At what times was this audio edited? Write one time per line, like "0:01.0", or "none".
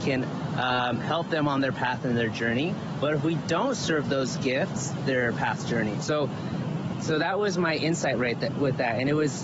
0:04.9
0:06.0